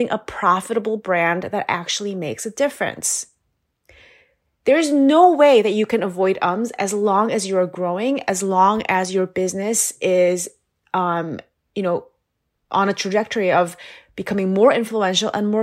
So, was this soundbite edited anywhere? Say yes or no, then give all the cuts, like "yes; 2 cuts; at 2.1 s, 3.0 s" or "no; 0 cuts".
no; 0 cuts